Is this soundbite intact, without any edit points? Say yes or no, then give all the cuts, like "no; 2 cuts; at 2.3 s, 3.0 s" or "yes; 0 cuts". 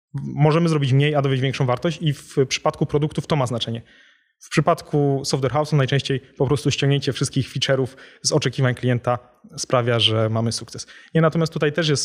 yes; 0 cuts